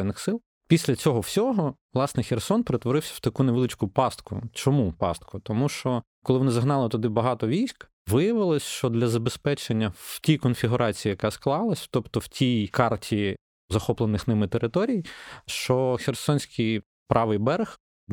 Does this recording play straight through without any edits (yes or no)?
yes